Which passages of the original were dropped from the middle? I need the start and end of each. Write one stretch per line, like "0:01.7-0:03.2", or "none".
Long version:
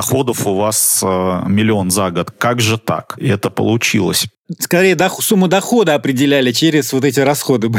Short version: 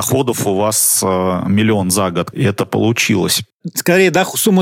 0:02.3-0:03.2

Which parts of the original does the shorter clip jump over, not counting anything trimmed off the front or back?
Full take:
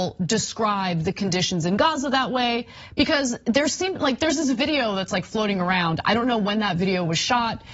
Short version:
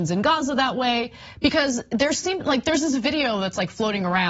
none

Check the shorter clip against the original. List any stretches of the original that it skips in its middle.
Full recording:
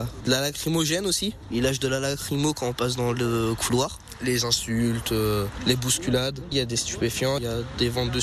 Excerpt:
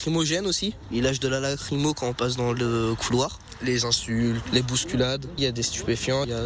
0:05.0-0:05.6

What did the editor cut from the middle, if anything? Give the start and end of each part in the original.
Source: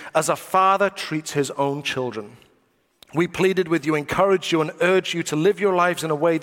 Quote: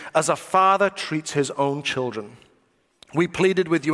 none

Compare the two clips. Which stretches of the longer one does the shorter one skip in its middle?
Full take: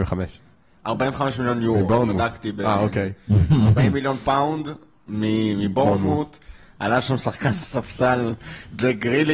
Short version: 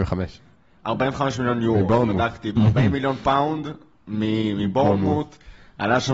0:02.6-0:03.6

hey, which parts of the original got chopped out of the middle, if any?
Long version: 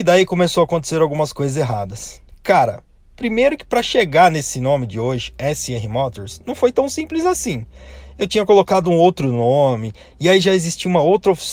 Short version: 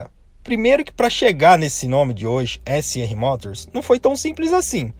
none

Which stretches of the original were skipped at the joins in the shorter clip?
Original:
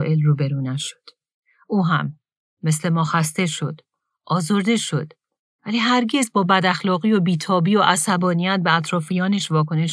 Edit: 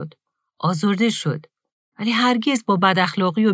none

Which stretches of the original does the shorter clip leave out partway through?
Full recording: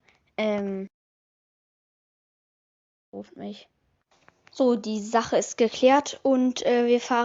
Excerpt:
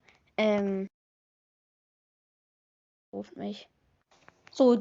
none

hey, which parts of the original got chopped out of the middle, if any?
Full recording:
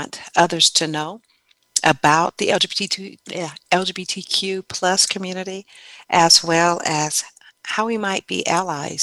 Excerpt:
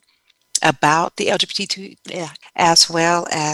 0:03.6-0:06.0

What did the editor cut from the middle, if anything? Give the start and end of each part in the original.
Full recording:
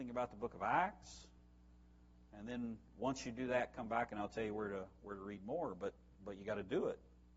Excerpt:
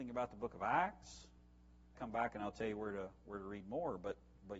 0:02.0-0:03.7

